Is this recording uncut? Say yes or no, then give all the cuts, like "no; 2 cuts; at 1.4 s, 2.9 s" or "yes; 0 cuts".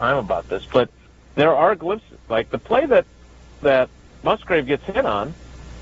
yes; 0 cuts